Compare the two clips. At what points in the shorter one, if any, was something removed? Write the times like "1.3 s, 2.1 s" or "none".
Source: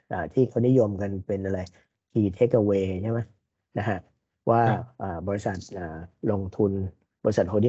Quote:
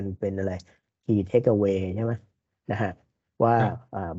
none

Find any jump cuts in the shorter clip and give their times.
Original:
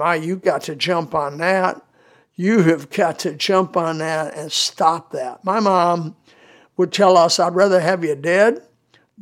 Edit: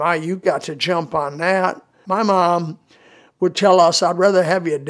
2.0 s

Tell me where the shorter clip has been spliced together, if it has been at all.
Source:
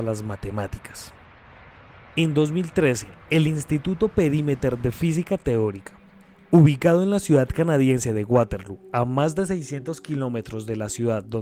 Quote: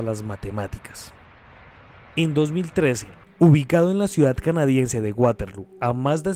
3.2 s

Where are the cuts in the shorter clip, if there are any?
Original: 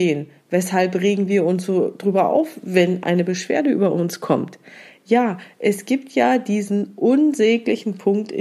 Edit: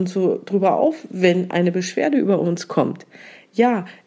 none

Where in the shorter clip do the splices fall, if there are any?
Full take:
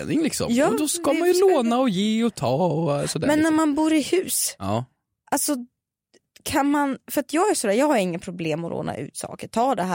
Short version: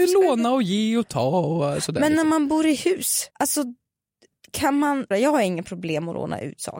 3.3 s, 5.1 s

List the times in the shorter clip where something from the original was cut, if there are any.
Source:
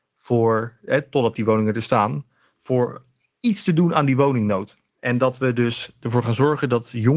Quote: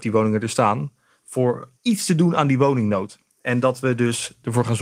1.7 s

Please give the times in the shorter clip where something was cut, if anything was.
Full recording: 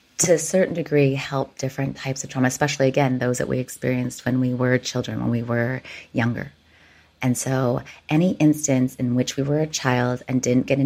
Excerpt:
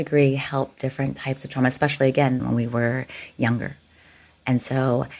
2.4 s

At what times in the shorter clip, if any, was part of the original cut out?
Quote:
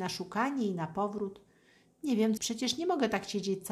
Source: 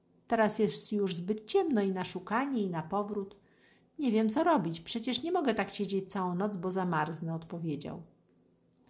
2.4 s

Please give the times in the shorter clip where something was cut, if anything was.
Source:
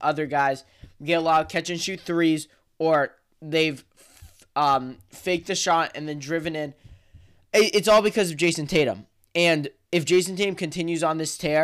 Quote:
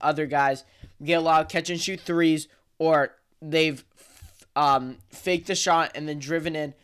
none

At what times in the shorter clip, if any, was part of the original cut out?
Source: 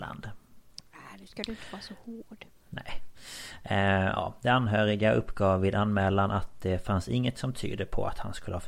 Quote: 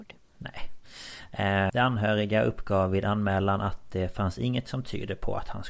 1.7 s

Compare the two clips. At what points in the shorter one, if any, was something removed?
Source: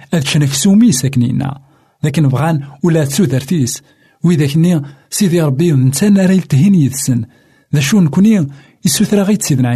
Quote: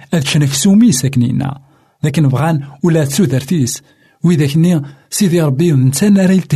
none

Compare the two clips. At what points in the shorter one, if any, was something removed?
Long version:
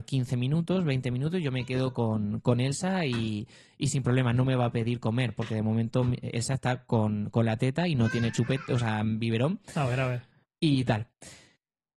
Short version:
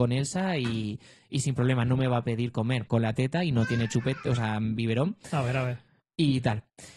2.9 s

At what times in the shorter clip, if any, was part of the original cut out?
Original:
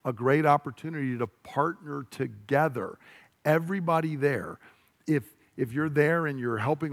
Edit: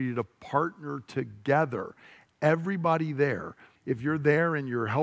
3.8 s

